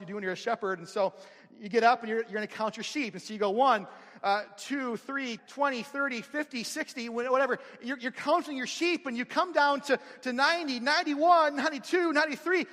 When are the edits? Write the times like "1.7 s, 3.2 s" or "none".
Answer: 5.4 s